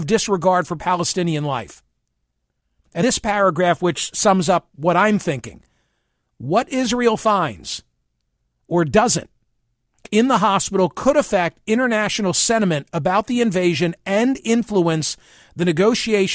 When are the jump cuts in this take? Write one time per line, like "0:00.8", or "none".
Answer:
0:03.0